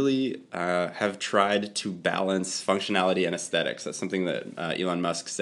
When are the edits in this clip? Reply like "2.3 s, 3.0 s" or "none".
none

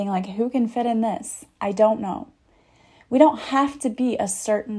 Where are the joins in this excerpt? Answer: none

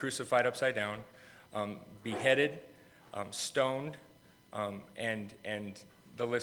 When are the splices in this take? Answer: none

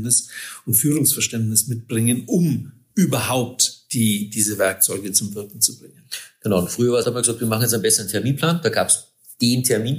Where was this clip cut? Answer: 7.0 s

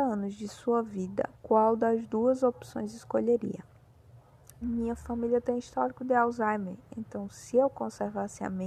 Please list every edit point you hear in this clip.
1.3 s, 4.6 s

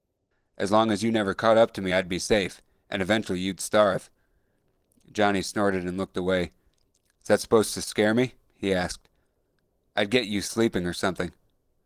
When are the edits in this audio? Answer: none

